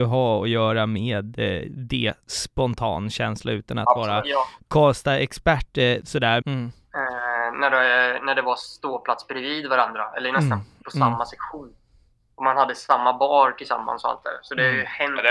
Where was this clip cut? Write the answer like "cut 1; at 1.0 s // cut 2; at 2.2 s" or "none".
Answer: cut 1; at 6.4 s